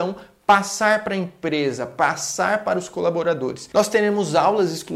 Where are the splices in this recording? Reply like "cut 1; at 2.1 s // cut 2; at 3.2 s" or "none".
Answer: cut 1; at 3.7 s